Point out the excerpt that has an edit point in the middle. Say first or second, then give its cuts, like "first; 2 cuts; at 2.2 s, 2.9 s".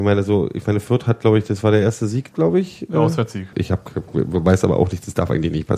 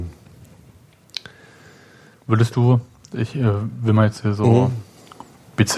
first; 2 cuts; at 2.3 s, 3.5 s